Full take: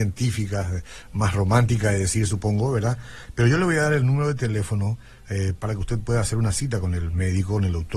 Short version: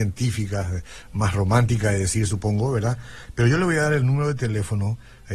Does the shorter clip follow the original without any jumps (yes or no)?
yes